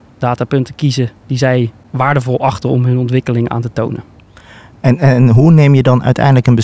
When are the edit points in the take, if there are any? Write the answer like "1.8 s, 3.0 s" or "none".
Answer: none